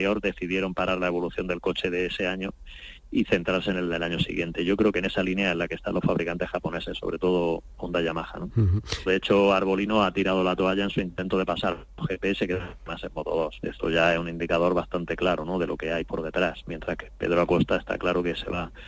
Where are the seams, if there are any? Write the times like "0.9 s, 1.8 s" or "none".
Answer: 9.1 s